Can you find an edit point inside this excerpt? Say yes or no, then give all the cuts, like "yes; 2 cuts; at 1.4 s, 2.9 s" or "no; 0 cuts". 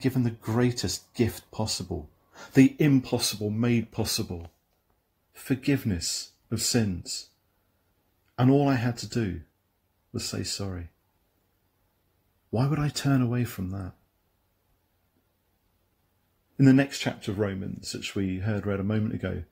no; 0 cuts